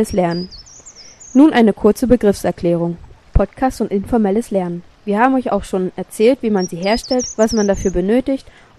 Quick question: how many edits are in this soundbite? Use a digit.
2